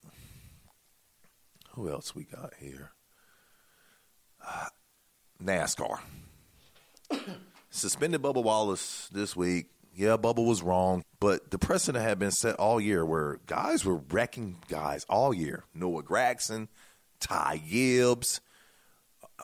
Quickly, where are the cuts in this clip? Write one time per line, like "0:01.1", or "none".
0:11.0
0:15.7